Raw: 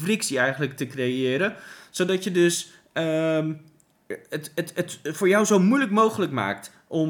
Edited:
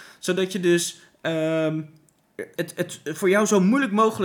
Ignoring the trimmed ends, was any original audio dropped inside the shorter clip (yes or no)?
yes